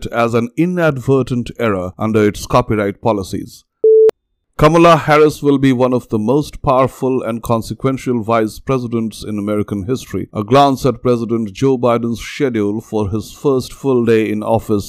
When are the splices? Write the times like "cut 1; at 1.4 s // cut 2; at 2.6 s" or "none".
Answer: cut 1; at 3.8 s

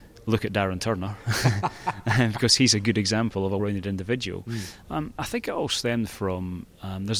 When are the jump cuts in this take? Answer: cut 1; at 3.6 s // cut 2; at 4.8 s

